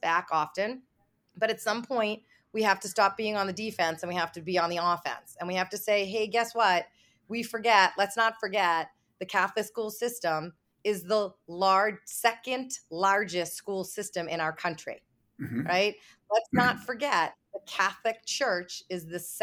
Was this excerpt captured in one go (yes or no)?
yes